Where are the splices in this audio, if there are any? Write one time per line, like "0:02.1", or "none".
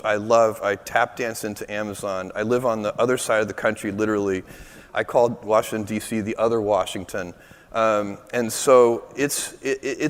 none